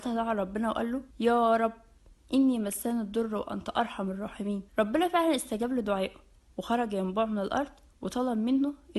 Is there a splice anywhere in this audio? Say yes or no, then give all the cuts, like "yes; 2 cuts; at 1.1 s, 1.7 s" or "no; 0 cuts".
yes; 2 cuts; at 1.1 s, 4.7 s